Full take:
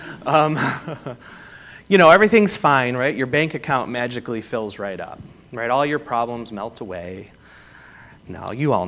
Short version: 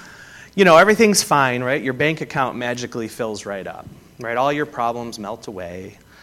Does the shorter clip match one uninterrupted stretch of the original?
yes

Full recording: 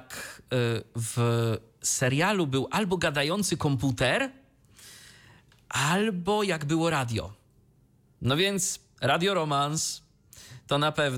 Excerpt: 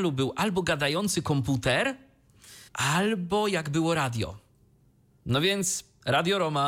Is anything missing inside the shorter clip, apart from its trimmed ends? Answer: yes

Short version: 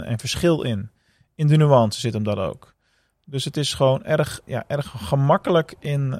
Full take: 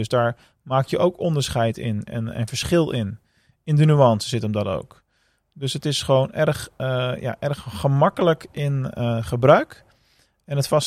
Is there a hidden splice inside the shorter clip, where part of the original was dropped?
yes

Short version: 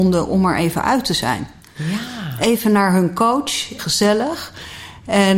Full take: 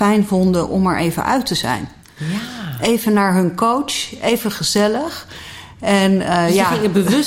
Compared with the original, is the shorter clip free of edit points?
no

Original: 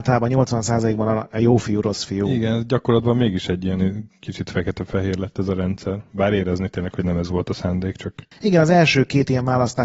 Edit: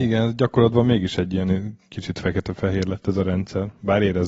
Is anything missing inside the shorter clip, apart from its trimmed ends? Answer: no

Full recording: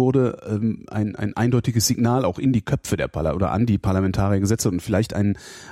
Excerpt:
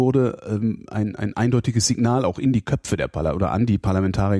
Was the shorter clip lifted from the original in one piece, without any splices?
yes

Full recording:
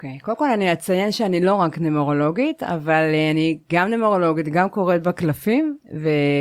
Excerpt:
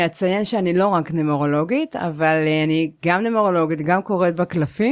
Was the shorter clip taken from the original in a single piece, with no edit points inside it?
yes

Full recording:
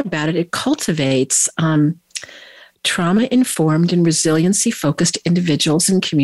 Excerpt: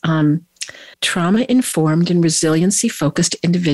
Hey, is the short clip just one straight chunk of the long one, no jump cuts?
no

